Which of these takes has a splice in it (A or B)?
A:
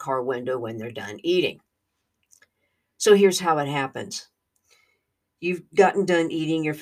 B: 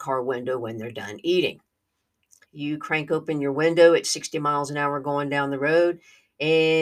B